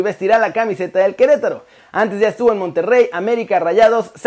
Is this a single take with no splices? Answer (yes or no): yes